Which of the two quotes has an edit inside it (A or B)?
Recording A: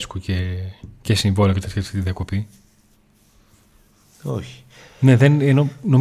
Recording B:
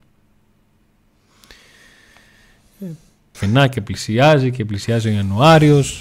B